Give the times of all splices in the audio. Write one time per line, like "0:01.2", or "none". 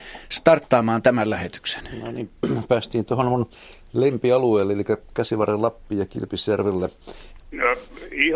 0:07.4